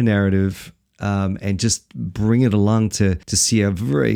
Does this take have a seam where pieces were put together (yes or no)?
yes